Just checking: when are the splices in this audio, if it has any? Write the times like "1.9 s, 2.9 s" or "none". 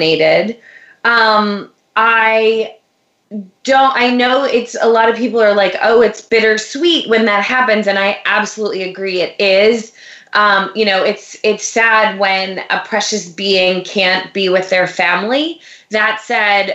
none